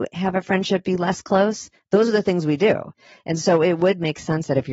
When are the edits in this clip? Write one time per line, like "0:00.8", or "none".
none